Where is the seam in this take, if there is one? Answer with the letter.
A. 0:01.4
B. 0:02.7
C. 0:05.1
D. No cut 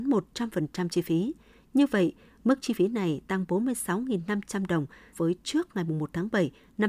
C